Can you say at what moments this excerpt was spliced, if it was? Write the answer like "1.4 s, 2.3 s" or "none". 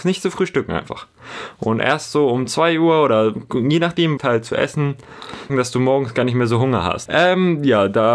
4.2 s, 5.5 s, 7.1 s